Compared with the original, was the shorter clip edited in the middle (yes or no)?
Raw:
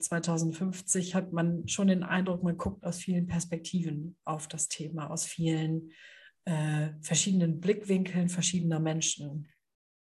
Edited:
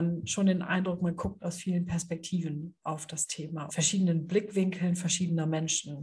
yes